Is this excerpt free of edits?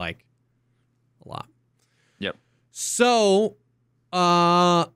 yes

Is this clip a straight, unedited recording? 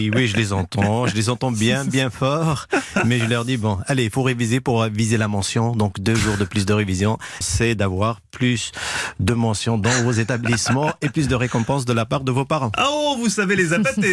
no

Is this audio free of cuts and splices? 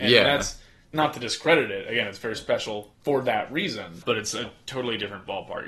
no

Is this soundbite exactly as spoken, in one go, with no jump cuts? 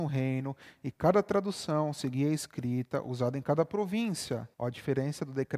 no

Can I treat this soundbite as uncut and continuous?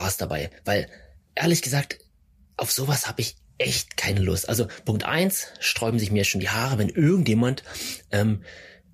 yes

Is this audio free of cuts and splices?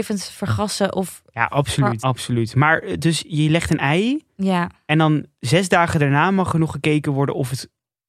no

